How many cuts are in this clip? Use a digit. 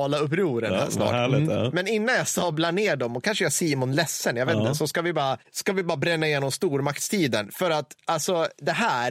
0